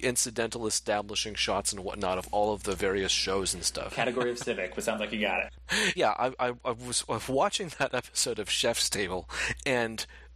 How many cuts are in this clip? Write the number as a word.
two